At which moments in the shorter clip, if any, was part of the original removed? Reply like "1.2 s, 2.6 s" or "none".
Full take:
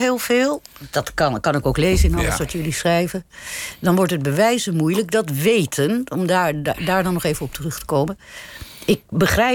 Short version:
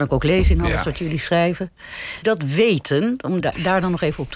2.2 s, 3.4 s